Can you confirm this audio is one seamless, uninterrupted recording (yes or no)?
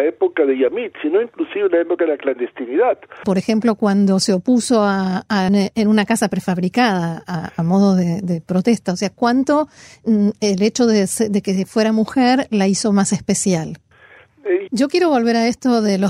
no